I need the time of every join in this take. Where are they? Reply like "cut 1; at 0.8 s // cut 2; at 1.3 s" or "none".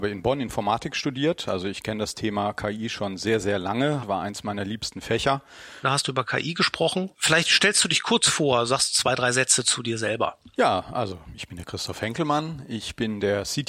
cut 1; at 4.0 s // cut 2; at 5.8 s // cut 3; at 7.1 s